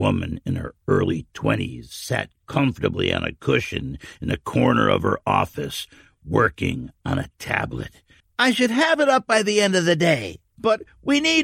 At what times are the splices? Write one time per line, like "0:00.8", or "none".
0:08.2